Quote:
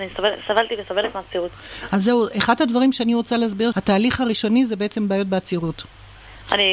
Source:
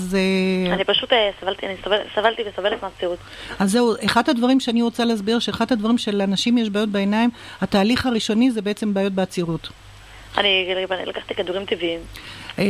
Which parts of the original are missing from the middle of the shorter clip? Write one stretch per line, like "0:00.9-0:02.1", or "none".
0:05.4-0:07.6

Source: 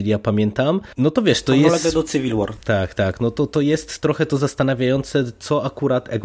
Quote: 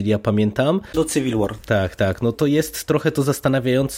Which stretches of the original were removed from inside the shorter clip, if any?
0:00.9-0:01.9
0:03.3-0:03.5

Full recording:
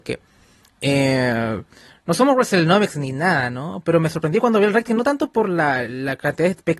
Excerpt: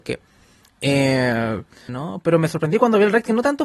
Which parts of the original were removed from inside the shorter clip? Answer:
0:01.9-0:03.5

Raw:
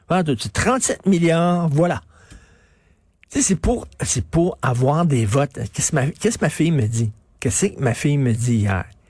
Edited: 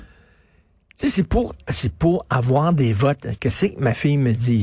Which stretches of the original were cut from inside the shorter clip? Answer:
0:05.7-0:07.4

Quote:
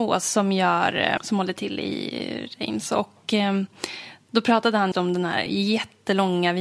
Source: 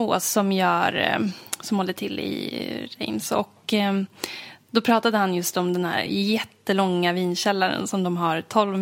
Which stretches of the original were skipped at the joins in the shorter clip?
0:01.2-0:01.6
0:05.3-0:05.5

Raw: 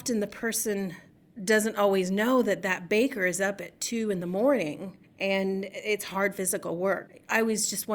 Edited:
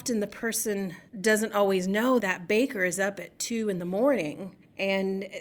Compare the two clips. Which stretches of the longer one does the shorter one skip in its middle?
0:01.1-0:01.3
0:02.4-0:02.6

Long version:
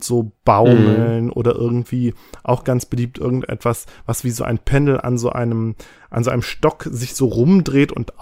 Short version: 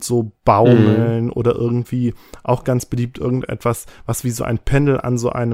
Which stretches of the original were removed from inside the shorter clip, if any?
none

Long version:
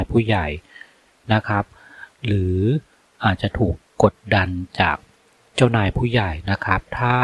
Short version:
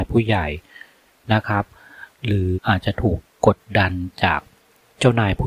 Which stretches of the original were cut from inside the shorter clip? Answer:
0:02.5-0:03.1

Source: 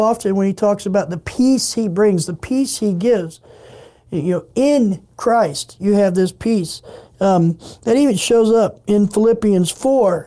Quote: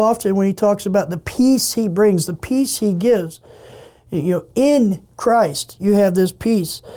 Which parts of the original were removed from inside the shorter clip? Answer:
none

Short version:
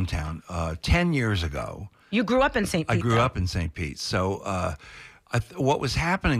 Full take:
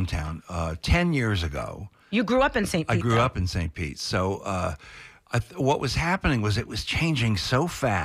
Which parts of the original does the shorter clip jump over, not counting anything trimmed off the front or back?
none

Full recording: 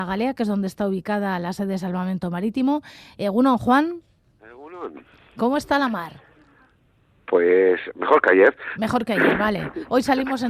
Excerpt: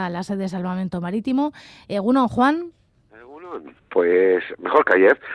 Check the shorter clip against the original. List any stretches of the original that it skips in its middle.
0:05.1-0:07.1

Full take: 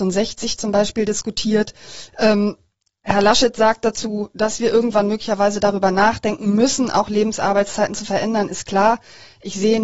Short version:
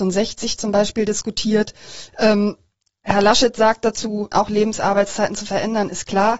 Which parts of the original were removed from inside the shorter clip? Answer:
0:04.3-0:06.9

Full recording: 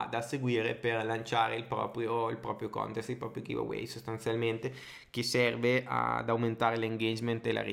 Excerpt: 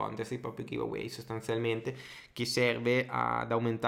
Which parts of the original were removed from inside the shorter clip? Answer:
none

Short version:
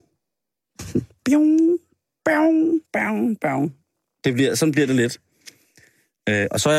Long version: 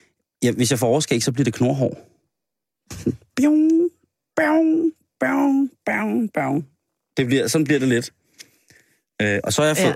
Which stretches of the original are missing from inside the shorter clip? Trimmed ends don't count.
0:05.0-0:05.8

